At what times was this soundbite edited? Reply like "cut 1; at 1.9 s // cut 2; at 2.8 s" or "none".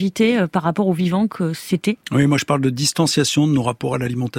cut 1; at 2.0 s

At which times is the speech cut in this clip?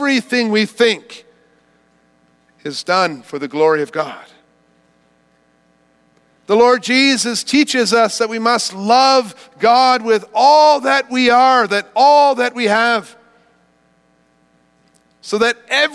cut 1; at 6.4 s

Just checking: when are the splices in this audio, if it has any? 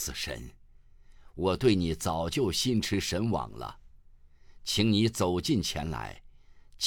none

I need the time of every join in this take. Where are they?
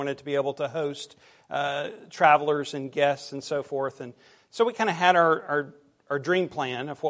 none

